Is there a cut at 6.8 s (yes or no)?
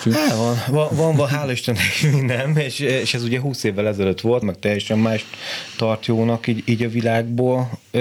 no